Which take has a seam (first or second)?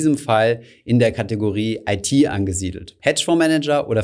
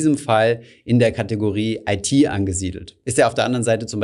first